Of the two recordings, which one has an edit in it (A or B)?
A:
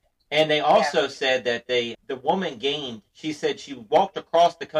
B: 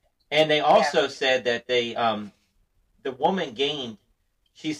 A